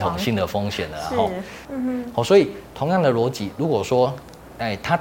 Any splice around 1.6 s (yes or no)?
yes